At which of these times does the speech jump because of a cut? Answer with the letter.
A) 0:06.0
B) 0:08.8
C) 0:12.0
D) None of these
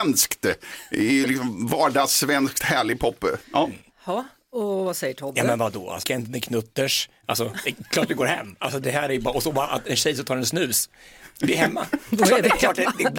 A